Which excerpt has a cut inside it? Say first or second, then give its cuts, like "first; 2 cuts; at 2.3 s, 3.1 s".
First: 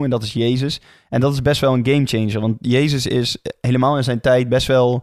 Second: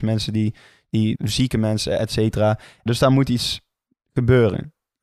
second; 2 cuts; at 1.1 s, 2.9 s